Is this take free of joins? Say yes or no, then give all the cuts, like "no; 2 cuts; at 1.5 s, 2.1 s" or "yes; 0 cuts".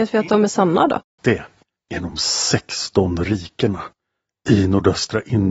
no; 1 cut; at 1.2 s